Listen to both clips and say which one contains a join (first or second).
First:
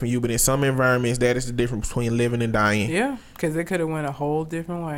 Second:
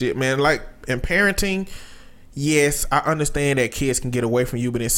first